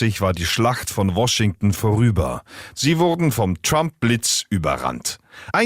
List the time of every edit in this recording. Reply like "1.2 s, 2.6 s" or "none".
2.7 s